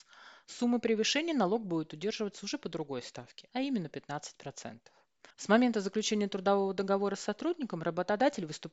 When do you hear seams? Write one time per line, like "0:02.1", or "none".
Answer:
0:05.3